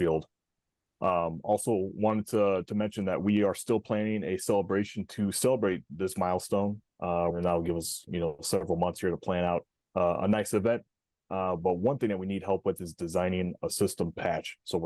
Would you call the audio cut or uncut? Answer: cut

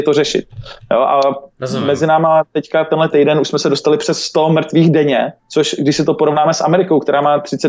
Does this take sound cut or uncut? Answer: cut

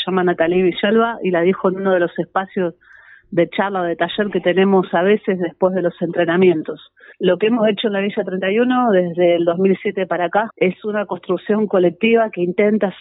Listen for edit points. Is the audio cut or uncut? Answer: cut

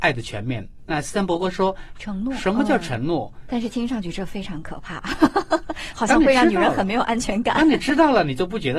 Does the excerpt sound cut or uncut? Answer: cut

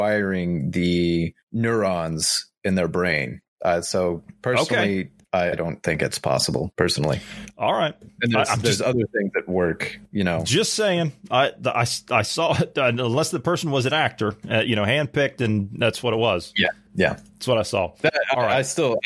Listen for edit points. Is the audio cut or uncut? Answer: cut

